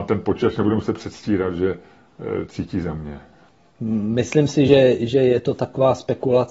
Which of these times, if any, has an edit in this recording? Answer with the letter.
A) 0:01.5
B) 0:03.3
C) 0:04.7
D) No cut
D